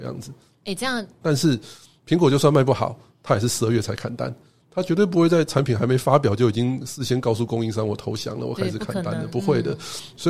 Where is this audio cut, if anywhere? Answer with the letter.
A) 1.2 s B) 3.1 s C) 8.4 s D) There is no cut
A